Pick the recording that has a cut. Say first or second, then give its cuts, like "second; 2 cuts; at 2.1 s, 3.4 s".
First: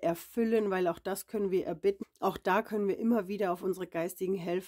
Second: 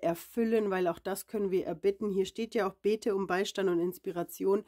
first; 1 cut; at 2.0 s